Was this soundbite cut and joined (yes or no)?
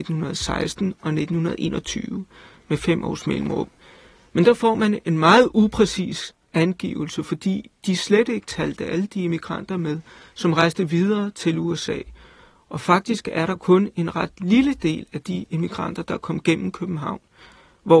no